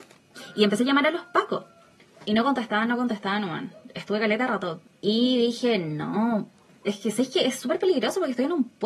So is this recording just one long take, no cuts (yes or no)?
yes